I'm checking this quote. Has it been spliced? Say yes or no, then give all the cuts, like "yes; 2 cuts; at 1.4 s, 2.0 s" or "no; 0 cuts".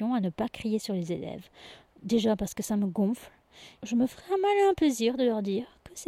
yes; 1 cut; at 3.8 s